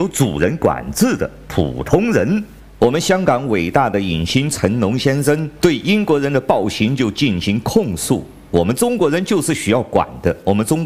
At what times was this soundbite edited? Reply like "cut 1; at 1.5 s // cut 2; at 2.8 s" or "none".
none